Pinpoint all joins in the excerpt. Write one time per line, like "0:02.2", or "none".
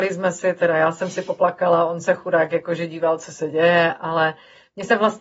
none